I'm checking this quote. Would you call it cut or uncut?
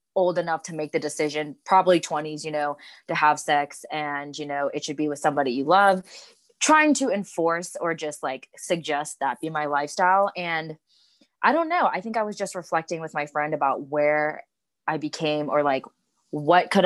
uncut